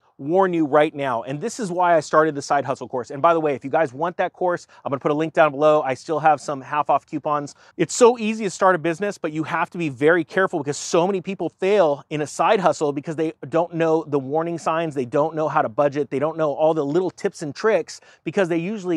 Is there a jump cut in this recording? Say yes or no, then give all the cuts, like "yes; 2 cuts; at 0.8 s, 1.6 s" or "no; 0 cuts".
yes; 1 cut; at 7.7 s